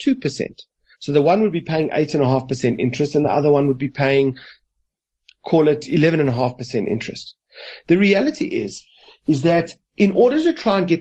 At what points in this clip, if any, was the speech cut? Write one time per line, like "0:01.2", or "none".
none